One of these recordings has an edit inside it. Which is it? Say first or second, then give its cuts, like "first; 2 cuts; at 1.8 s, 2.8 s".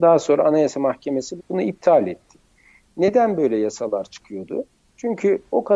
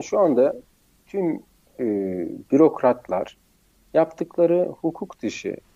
first; 1 cut; at 1.4 s